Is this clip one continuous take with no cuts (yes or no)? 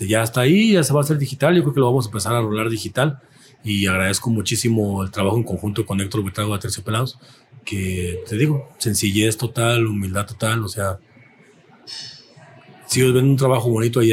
yes